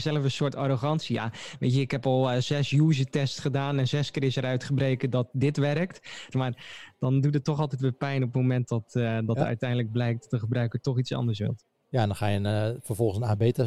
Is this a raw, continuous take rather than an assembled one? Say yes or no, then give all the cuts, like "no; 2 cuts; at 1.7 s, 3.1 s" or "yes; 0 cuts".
no; 1 cut; at 6.3 s